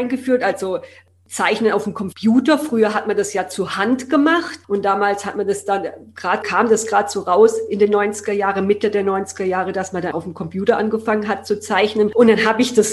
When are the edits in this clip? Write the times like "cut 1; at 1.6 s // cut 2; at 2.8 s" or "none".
cut 1; at 6.4 s // cut 2; at 10.1 s